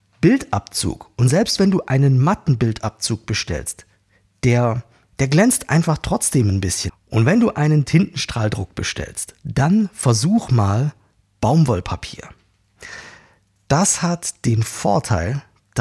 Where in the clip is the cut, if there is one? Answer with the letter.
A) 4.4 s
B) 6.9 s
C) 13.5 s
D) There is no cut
B